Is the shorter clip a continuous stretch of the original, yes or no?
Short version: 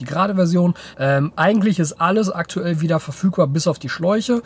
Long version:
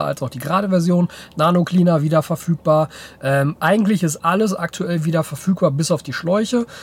no